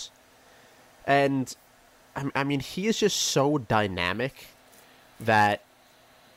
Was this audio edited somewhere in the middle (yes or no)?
no